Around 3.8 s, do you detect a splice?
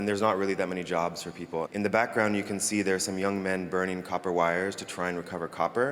no; 1 cut; at 1.7 s

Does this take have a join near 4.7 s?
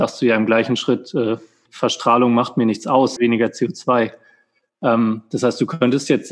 no; 2 cuts; at 1.7 s, 3.2 s

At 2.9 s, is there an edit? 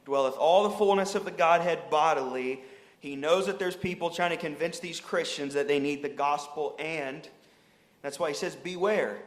yes; 1 cut; at 2.9 s

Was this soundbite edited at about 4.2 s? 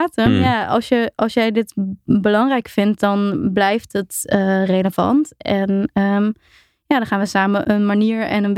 no; 1 cut; at 7.6 s

